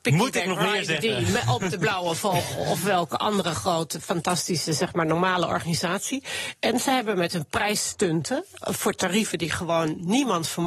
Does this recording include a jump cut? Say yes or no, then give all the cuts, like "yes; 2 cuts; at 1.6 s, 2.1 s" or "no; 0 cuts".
no; 0 cuts